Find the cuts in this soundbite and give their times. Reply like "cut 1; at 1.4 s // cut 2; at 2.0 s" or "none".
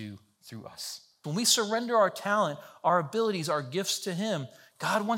cut 1; at 1.2 s

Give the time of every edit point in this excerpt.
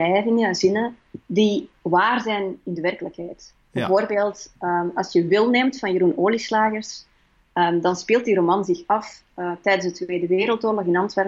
none

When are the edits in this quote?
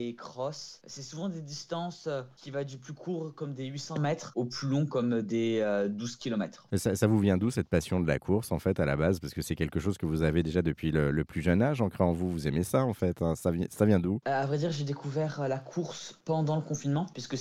none

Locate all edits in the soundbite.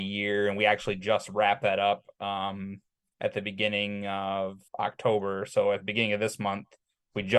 cut 1; at 4.7 s

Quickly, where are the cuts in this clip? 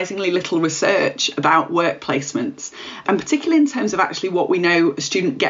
cut 1; at 3.0 s

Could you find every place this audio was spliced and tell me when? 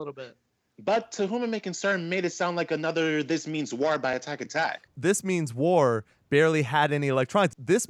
none

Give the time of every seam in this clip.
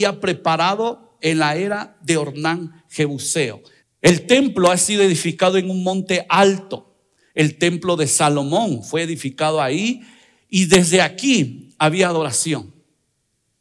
cut 1; at 3.8 s

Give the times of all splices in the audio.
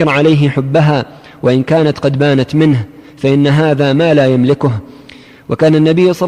none

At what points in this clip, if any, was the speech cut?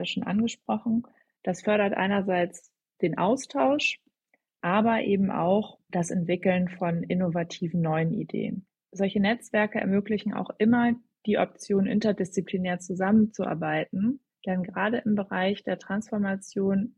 cut 1; at 1.4 s

